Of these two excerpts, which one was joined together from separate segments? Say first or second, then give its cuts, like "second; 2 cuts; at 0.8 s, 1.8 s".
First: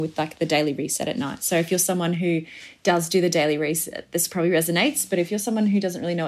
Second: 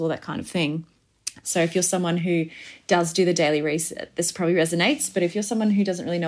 second; 1 cut; at 1.4 s